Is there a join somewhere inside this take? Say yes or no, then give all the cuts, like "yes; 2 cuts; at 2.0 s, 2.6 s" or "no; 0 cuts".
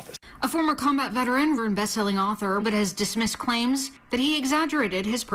yes; 2 cuts; at 1.6 s, 2.6 s